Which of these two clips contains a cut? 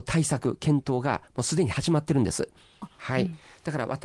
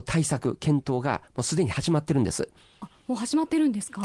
first; 1 cut; at 3.0 s

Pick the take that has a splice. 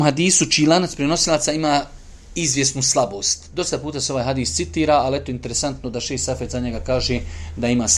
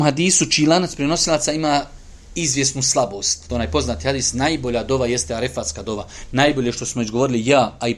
second; 1 cut; at 3.5 s

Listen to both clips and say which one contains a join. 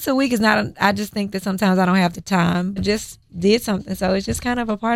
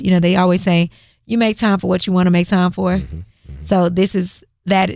first; 1 cut; at 2.8 s

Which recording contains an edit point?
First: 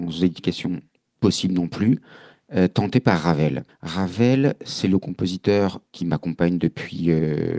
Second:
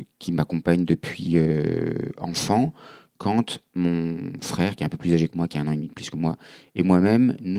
first; 2 cuts; at 3.7 s, 5.9 s

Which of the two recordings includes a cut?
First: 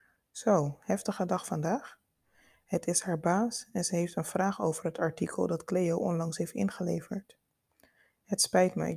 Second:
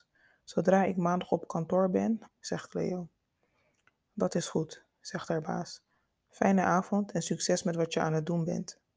second; 1 cut; at 2.3 s

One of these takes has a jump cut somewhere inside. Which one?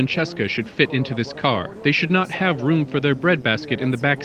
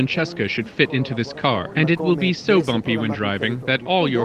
second; 1 cut; at 1.7 s

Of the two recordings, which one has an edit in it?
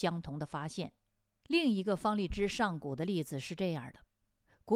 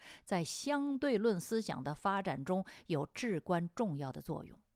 first; 1 cut; at 1.4 s

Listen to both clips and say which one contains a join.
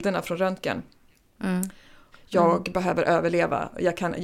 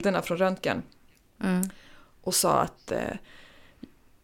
first; 1 cut; at 2.1 s

